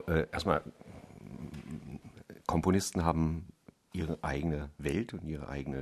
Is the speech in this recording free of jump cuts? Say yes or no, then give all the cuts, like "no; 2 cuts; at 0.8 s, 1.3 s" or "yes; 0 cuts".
yes; 0 cuts